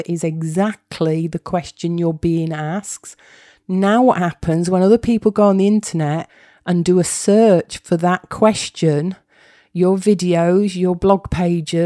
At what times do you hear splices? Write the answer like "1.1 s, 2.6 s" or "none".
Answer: none